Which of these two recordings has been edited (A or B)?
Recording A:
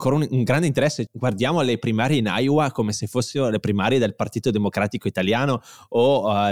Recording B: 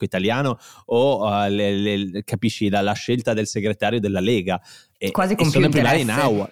A